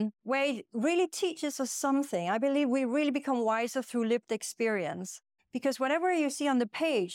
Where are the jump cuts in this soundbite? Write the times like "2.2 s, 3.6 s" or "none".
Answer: 5.4 s